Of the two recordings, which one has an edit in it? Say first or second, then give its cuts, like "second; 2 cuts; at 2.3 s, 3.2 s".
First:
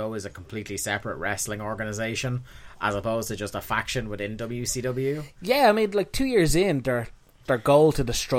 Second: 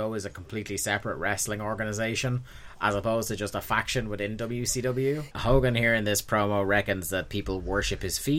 second; 1 cut; at 5.3 s